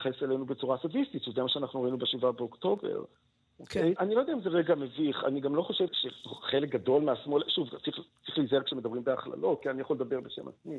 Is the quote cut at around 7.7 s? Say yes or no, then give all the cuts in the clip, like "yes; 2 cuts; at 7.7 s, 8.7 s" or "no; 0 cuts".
no; 2 cuts; at 4.0 s, 5.9 s